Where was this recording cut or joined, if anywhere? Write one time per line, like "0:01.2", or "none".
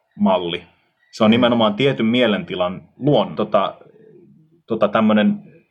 0:03.4

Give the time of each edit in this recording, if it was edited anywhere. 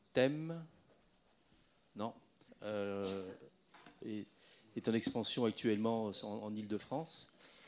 0:02.5
0:04.0

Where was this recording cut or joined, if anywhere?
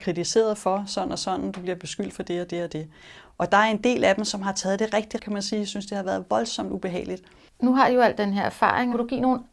0:05.2
0:07.5

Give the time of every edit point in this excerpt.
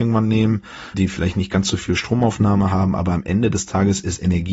0:00.9

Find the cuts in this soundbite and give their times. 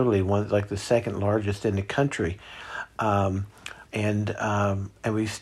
0:03.9

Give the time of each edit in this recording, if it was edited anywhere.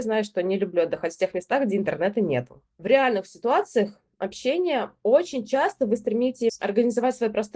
none

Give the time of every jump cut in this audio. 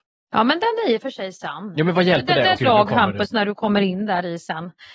0:02.6

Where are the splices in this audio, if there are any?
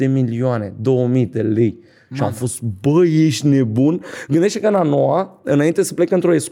none

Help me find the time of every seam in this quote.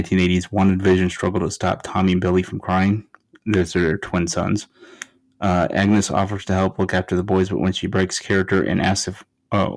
none

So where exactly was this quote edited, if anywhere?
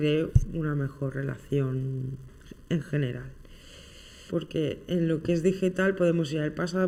0:04.3

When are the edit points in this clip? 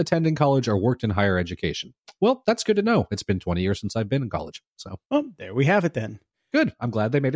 0:05.1

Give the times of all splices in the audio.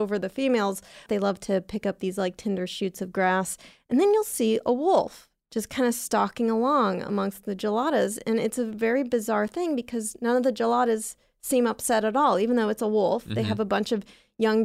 0:01.1

